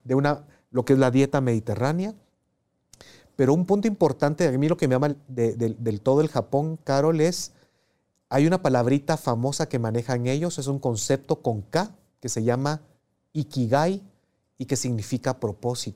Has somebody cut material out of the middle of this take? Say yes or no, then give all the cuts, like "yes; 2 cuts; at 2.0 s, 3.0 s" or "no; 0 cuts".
no; 0 cuts